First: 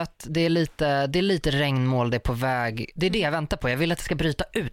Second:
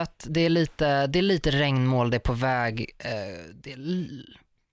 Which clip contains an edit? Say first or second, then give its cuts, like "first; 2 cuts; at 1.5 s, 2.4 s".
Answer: first; 1 cut; at 3.0 s